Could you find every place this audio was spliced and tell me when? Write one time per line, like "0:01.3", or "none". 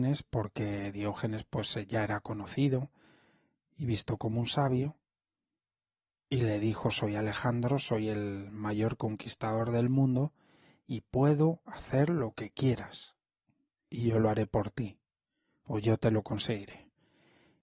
0:13.9